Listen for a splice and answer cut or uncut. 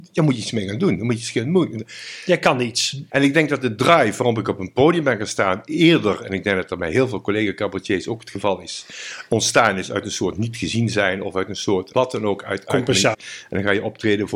cut